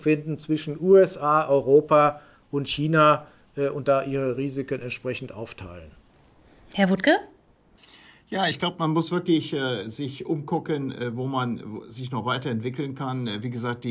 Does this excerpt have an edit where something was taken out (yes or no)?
no